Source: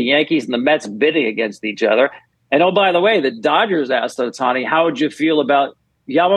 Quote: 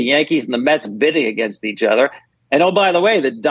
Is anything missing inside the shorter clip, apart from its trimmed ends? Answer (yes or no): no